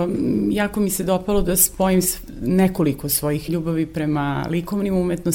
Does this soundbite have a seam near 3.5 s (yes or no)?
yes